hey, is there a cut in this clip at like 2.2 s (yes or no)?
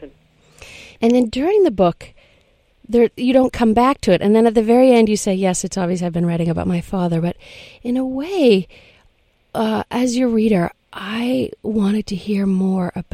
no